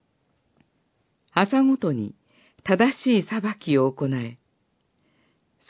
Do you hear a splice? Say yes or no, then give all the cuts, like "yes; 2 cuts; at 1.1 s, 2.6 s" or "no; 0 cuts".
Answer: yes; 1 cut; at 1.2 s